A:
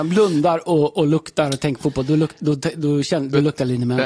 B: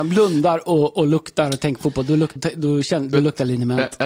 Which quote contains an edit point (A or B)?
B